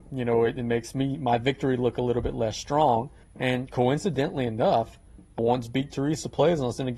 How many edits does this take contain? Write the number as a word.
two